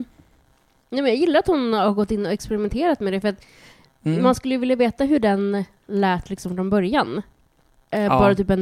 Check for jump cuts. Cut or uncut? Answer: uncut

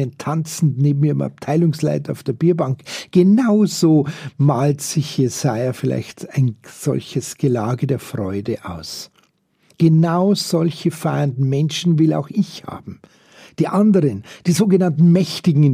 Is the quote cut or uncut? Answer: uncut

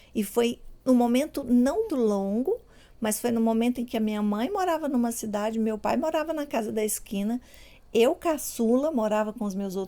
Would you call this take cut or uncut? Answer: cut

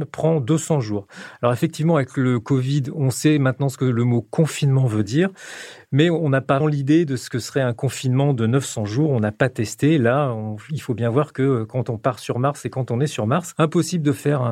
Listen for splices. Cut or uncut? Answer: cut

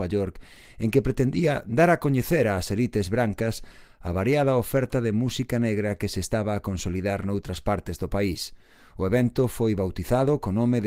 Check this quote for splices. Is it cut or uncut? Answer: uncut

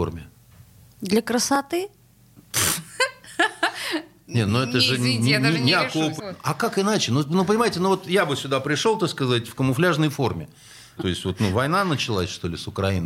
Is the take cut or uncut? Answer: cut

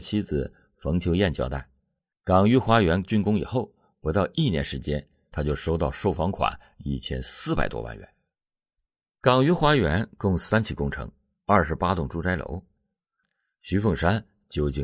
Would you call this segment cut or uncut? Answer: uncut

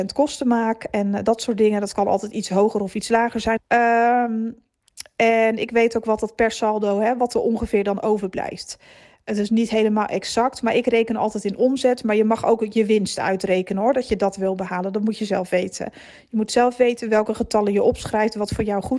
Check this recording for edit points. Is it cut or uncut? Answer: cut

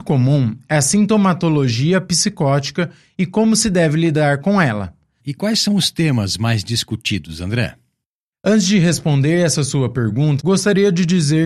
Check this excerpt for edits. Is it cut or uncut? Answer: cut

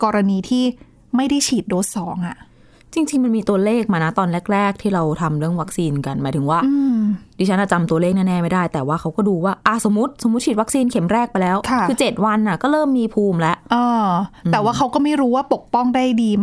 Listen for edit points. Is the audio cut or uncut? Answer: uncut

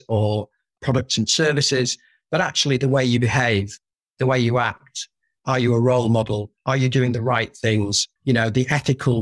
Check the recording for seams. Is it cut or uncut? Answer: uncut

